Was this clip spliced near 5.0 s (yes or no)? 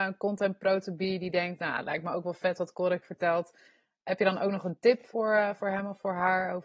no